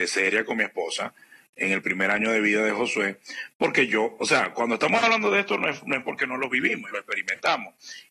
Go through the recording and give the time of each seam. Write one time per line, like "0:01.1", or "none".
0:06.9